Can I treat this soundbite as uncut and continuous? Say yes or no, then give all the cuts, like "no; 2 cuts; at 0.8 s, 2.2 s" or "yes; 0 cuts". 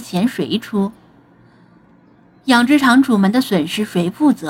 yes; 0 cuts